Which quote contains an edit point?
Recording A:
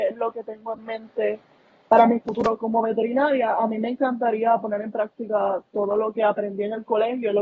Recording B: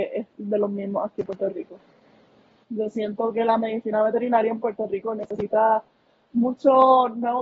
B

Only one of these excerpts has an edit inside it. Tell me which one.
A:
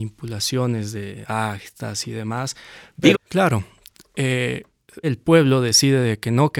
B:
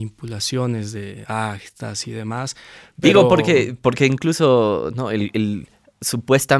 A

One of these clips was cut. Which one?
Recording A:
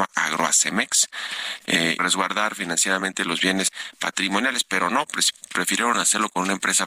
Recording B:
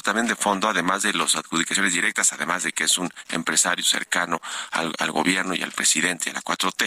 A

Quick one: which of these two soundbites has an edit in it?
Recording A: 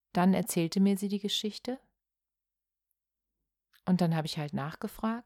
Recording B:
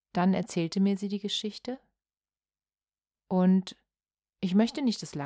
B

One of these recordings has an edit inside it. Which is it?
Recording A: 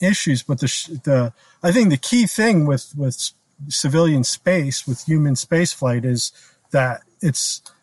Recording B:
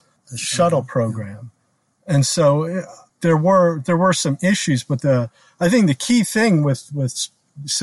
B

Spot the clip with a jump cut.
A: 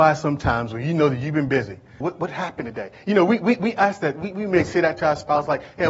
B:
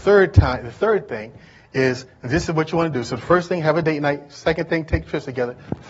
A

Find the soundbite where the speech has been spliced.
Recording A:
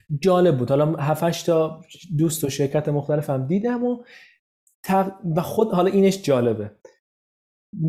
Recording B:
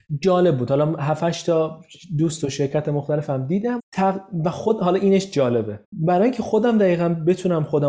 B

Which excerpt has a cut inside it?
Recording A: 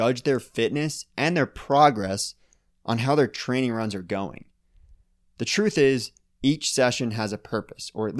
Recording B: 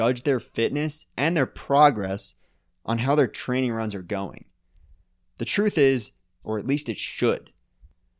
B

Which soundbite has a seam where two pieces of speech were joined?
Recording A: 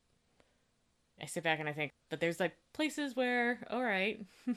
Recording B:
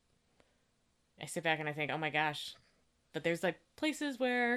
A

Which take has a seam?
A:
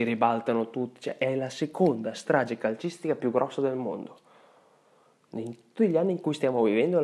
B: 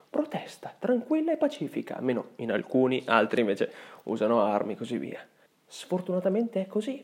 B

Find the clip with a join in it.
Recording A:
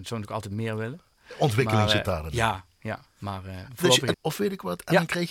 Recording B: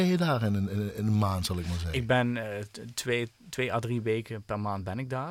A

